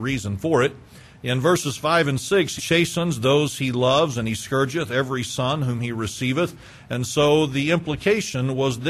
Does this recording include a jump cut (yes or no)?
yes